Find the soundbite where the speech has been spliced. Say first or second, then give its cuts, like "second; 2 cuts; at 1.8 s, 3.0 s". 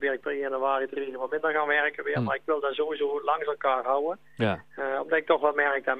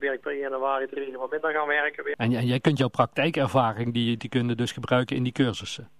second; 2 cuts; at 2.1 s, 4.2 s